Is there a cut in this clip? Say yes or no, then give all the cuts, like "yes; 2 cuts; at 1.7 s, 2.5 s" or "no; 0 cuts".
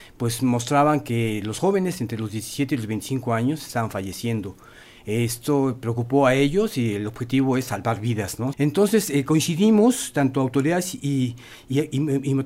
yes; 1 cut; at 8.5 s